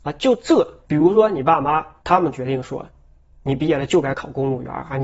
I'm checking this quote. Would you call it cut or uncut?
uncut